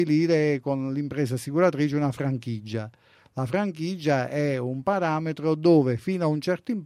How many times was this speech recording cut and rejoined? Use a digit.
0